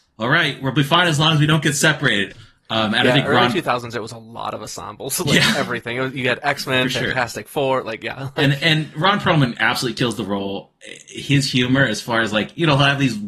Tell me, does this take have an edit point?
yes; 1 cut; at 2.3 s

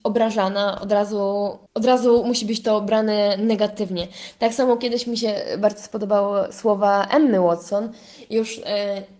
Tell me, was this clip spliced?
yes; 1 cut; at 1.7 s

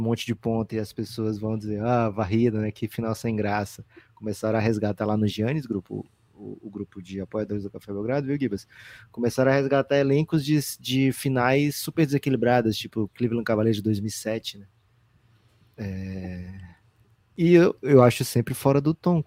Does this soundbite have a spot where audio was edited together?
no; 0 cuts

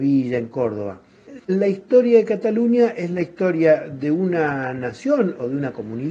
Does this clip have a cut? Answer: yes; 1 cut; at 1.4 s

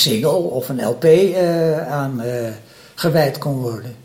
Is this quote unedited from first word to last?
yes; 0 cuts

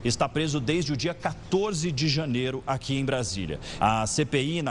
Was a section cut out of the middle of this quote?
yes; 1 cut; at 3.8 s

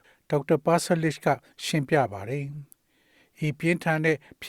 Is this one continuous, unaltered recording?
yes; 0 cuts

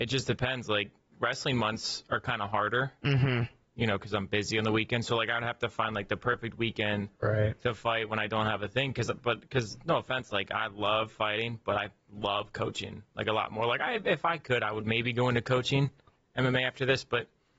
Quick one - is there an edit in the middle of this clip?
no; 0 cuts

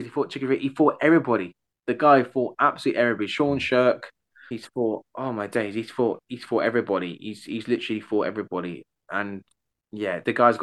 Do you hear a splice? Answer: yes; 1 cut; at 4.5 s

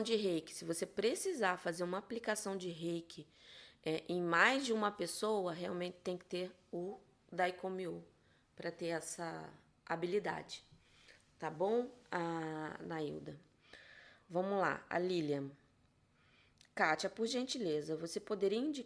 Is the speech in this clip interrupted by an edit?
no; 0 cuts

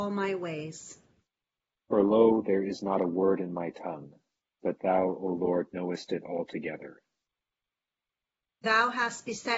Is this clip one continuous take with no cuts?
yes; 0 cuts

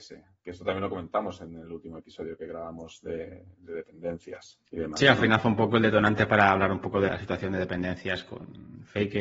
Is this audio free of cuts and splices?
no; 2 cuts; at 4.7 s, 7.1 s

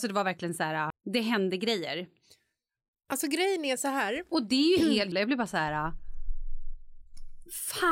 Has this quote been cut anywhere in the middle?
yes; 2 cuts; at 0.9 s, 5.1 s

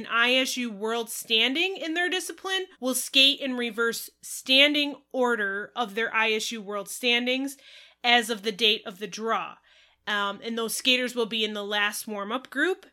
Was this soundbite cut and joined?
yes; 1 cut; at 2.7 s

